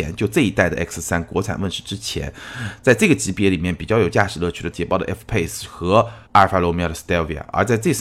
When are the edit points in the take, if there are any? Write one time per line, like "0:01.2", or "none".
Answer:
0:04.7
0:06.3

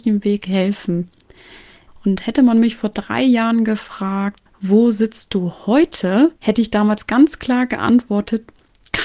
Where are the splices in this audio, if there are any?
0:01.9
0:04.5
0:06.4

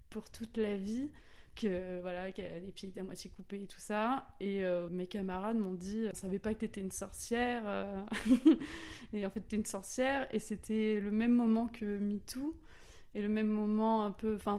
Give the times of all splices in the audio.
0:01.5
0:04.9
0:06.1

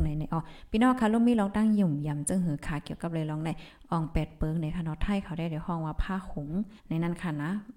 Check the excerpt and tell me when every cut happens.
0:06.8

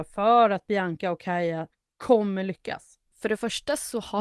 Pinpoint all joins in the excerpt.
0:03.1

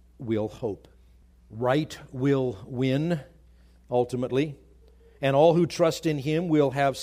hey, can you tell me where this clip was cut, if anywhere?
0:01.3

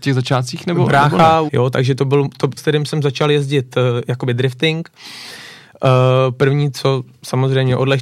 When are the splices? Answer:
0:01.5
0:02.6

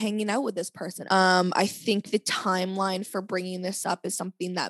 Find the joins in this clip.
0:01.1

